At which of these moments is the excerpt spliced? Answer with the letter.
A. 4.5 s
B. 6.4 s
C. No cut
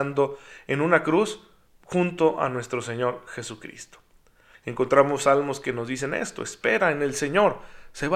A